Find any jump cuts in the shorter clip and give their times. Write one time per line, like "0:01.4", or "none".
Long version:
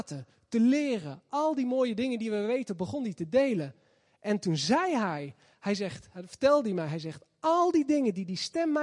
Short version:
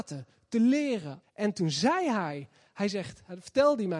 0:01.2

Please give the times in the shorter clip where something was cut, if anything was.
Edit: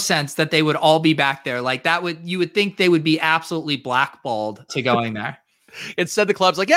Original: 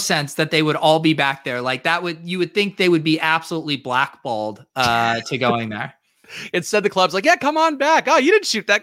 0:04.7

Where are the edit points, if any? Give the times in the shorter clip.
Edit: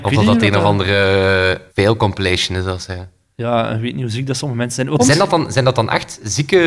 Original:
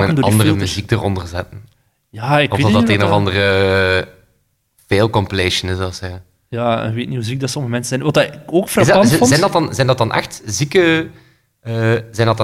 0:01.7
0:05.0

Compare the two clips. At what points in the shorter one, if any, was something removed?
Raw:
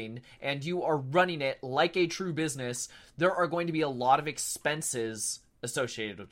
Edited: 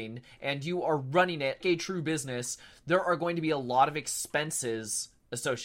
0:01.6

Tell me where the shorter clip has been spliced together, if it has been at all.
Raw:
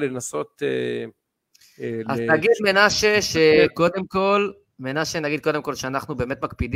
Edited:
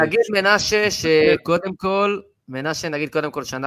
none

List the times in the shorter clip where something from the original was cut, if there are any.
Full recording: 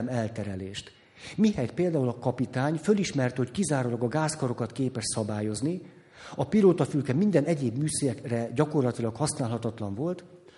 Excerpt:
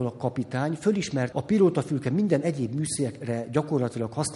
0:01.3

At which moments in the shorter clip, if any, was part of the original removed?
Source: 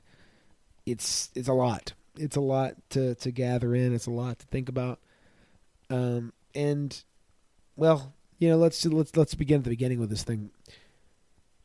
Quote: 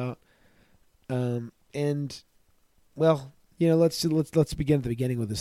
none

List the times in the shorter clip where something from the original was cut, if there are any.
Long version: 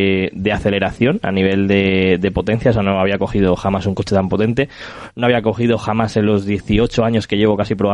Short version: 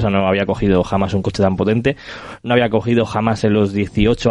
none

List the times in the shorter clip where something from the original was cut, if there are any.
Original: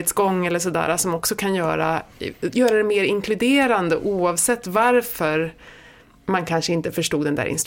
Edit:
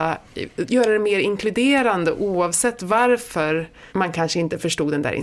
0:03.9

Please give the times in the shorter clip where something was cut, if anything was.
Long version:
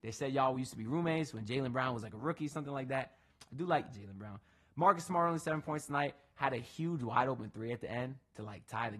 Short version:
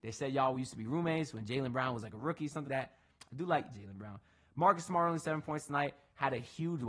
0:02.6

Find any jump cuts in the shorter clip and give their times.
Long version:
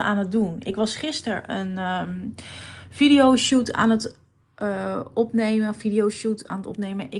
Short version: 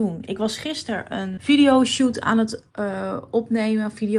0:01.4
0:02.7

